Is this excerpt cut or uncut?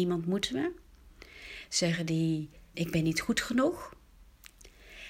cut